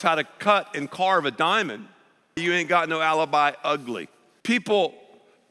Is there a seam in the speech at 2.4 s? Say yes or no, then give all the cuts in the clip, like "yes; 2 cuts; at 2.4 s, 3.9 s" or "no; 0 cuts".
yes; 2 cuts; at 2.4 s, 4.4 s